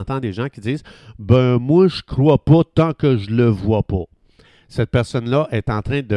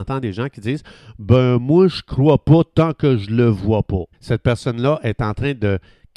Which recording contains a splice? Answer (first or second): second